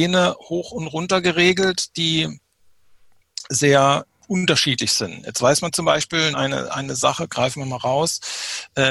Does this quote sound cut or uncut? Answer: cut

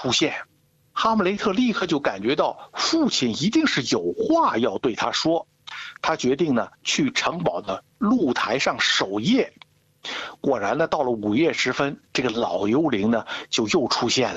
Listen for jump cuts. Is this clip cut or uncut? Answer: uncut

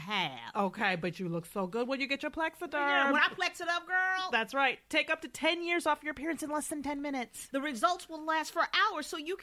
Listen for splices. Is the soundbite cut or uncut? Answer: uncut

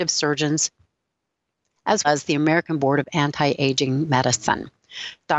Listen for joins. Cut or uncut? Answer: cut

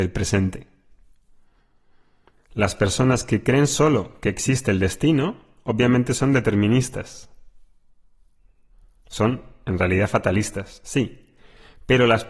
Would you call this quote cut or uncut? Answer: cut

